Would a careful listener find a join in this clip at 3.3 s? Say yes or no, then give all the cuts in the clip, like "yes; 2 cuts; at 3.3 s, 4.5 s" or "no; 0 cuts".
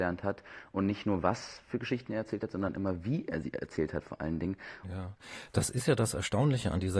no; 1 cut; at 4.8 s